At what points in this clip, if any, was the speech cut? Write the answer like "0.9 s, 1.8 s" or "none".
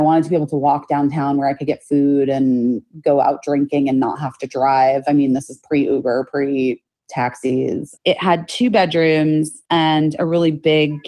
8.0 s, 9.7 s